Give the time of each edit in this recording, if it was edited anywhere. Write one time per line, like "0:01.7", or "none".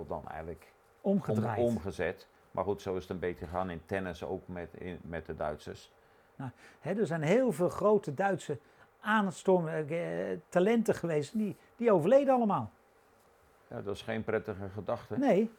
0:06.4